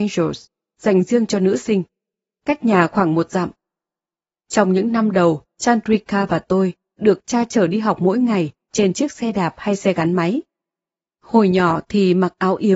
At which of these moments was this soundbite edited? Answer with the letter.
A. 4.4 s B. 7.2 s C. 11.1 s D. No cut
D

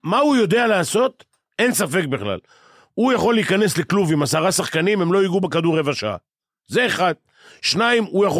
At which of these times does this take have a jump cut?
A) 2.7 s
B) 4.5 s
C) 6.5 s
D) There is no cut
D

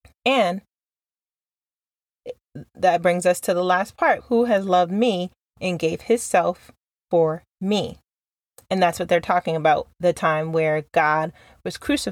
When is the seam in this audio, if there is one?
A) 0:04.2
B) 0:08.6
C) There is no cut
A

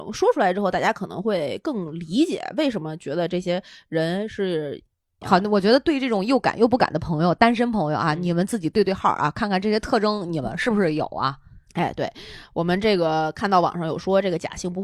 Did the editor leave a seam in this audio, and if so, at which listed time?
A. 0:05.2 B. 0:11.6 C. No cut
A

